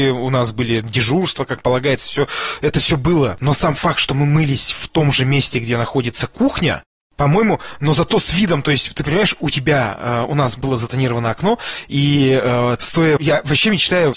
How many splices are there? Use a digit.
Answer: 1